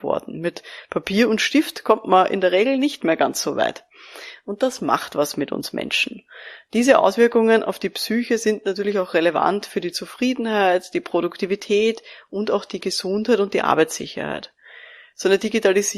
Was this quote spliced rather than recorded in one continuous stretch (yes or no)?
no